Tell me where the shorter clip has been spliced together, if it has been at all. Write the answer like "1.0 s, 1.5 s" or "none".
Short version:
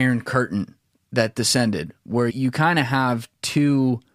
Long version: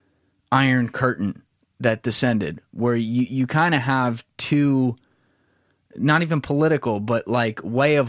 2.3 s

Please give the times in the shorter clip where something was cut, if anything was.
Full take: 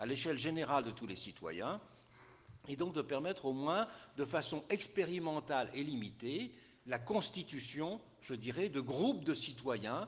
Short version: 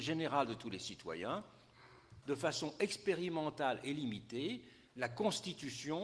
2.2 s

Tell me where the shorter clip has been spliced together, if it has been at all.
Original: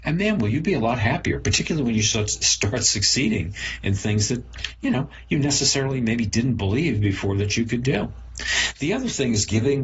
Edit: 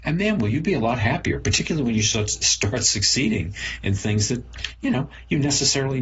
none

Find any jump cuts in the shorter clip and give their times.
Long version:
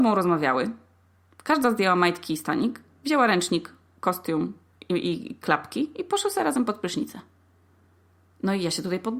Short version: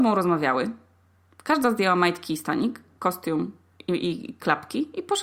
3.0 s

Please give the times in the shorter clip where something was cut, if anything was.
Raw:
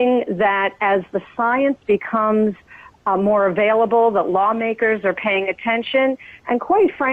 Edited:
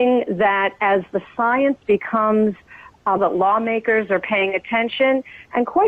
3.2 s

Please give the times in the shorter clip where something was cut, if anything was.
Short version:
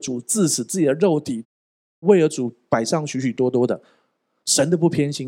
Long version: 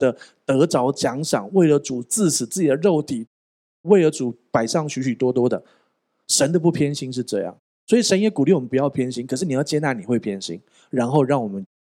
none

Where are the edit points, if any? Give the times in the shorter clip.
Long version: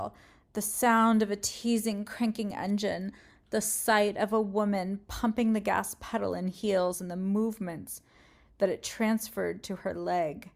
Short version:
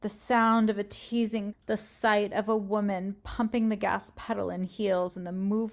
1.5 s

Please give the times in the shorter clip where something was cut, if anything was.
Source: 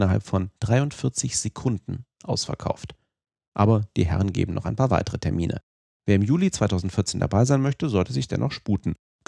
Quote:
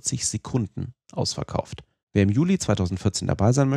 2.0 s

